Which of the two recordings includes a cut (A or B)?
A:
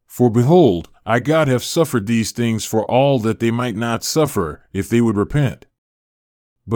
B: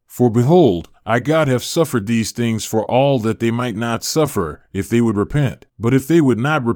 B